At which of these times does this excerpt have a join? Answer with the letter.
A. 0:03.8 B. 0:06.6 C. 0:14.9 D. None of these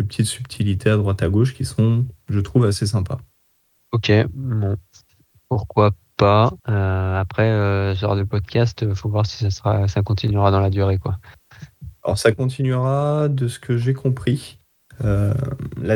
B